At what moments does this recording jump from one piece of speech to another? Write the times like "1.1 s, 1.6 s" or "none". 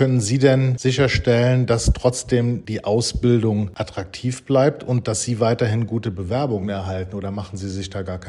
none